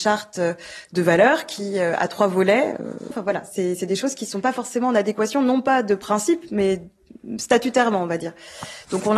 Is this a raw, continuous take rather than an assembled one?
no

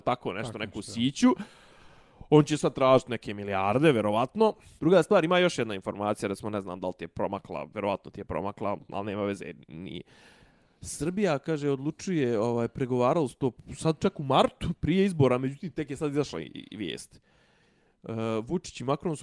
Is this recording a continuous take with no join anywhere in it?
no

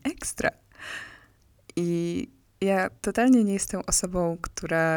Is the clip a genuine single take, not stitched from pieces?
yes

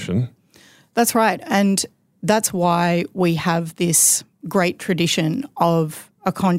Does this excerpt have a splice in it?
no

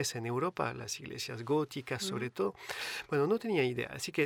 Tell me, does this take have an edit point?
no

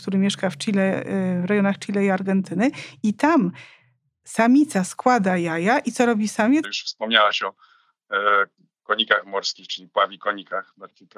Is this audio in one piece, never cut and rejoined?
no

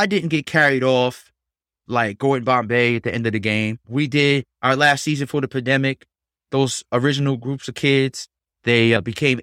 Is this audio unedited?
yes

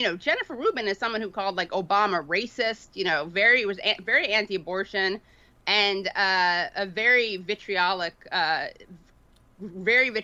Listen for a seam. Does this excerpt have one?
no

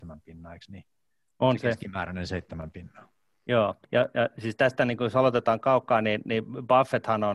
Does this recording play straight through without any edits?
no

